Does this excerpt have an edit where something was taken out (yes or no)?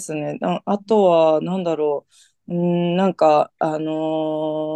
no